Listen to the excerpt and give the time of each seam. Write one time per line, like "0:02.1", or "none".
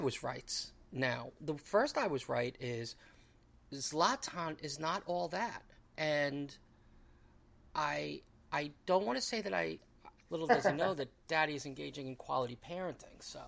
0:01.4
0:10.2